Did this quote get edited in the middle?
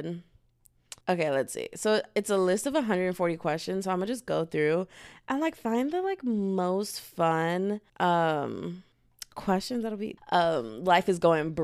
yes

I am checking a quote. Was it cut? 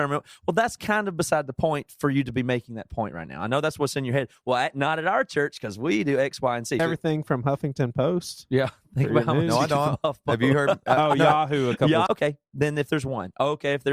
yes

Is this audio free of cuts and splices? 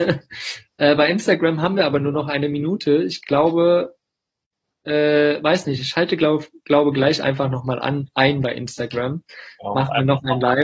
yes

